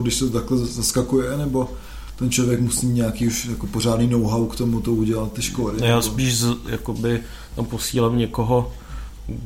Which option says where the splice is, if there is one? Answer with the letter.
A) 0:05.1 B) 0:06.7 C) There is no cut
B